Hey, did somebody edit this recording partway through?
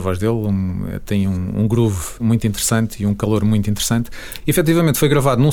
yes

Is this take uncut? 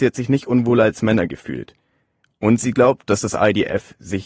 yes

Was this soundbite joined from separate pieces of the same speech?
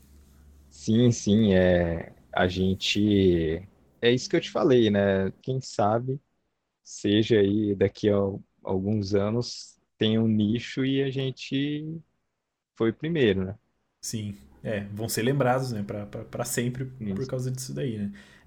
yes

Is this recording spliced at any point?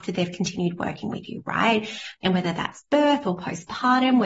yes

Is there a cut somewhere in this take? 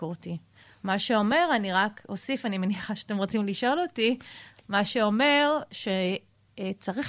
no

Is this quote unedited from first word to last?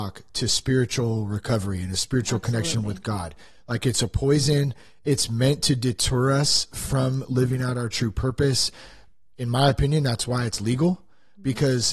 yes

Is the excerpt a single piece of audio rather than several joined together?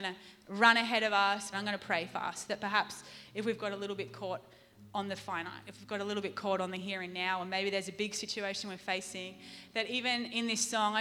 no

